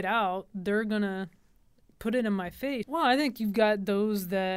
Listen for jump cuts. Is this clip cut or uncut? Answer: cut